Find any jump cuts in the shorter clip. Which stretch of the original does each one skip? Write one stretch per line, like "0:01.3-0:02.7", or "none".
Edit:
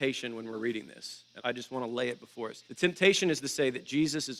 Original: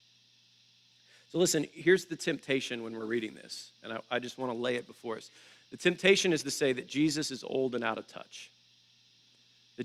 0:03.9-0:04.0
0:05.3-0:05.7